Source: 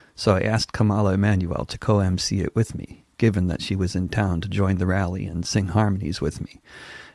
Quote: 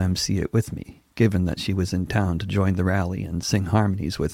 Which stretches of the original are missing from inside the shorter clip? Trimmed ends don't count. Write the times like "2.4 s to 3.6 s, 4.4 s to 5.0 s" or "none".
none